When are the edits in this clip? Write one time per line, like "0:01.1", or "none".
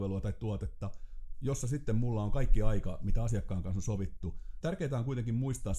0:01.3
0:04.6